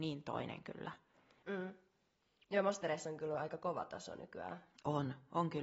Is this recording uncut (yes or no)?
no